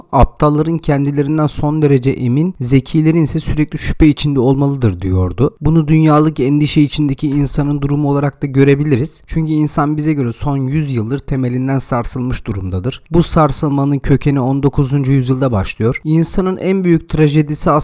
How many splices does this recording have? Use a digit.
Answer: 1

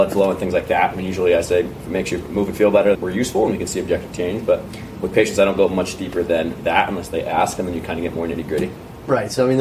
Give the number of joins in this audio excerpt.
1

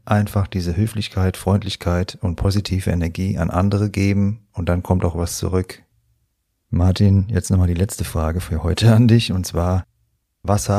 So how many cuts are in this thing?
0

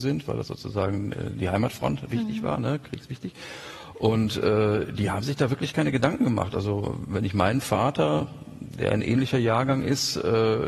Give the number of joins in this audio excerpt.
0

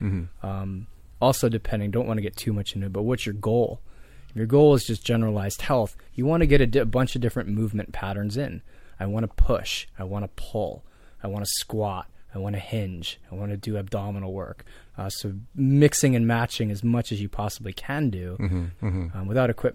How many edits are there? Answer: 2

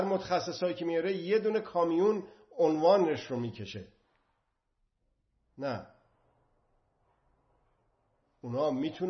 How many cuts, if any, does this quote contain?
0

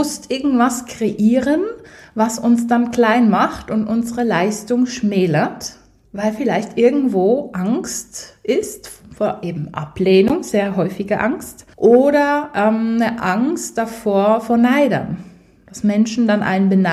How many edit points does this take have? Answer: 2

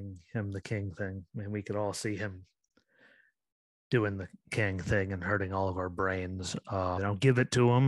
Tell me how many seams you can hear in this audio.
1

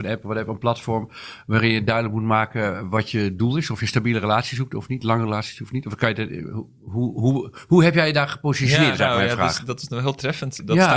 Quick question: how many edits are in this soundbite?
0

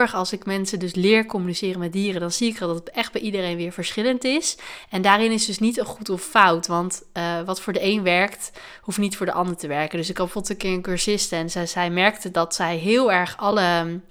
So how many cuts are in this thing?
0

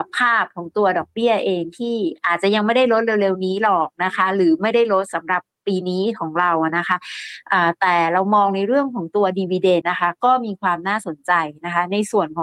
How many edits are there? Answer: 1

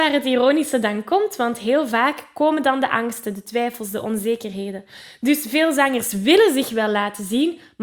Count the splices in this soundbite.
0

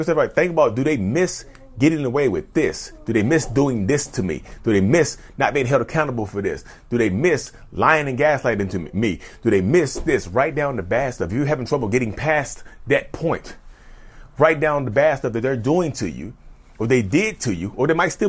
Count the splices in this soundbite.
0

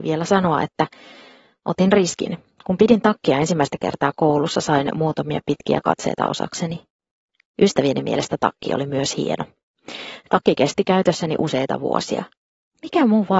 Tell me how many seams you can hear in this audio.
0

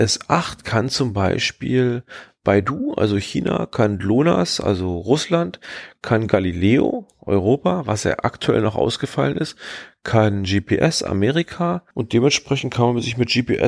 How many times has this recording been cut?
1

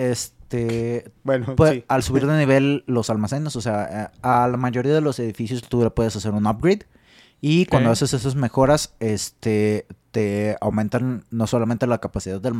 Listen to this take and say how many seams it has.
0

